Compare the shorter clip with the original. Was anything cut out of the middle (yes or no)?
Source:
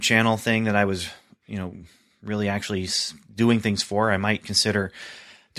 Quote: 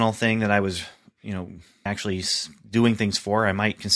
yes